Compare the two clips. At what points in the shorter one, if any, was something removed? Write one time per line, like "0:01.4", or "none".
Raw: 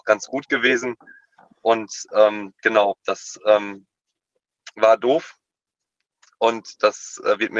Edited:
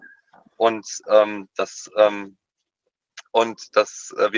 0:01.5
0:03.2